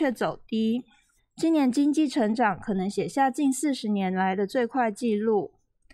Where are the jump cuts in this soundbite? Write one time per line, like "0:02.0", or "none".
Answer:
0:01.2